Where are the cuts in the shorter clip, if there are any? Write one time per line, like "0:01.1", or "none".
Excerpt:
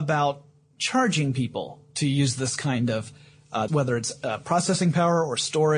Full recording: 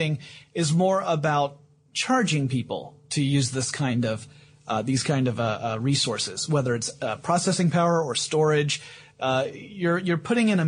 0:03.7